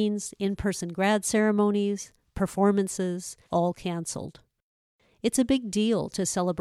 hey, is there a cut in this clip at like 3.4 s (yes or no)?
yes